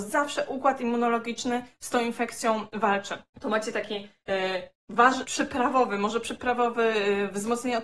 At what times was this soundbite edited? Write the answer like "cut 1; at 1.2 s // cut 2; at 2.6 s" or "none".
cut 1; at 5.2 s